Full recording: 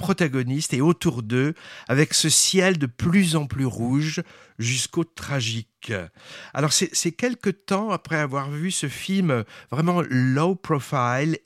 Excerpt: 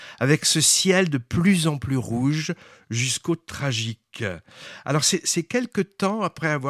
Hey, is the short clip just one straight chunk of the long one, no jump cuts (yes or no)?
yes